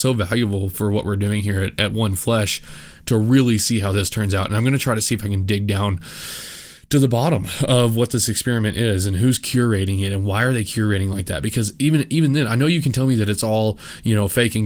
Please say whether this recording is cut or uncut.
uncut